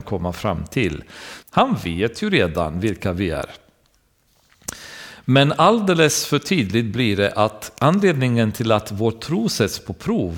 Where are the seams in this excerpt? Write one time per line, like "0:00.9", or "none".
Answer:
0:01.4